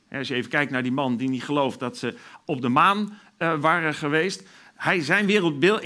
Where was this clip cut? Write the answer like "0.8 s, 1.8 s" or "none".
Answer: none